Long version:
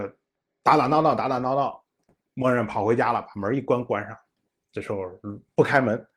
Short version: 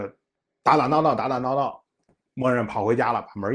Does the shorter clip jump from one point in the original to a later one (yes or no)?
no